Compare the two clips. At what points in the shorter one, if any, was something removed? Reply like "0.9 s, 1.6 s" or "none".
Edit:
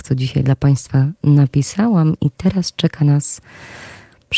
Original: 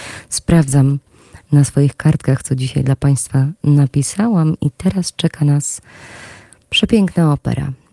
none